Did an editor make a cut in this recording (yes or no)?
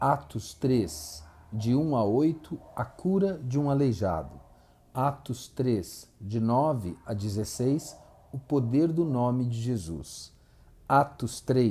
no